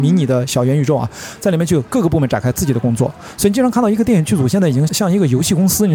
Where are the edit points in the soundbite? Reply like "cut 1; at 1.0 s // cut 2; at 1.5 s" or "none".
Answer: cut 1; at 4.9 s